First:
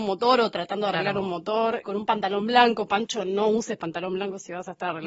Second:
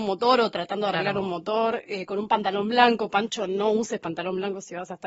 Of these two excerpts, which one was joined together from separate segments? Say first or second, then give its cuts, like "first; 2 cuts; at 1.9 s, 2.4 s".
first; 1 cut; at 1.8 s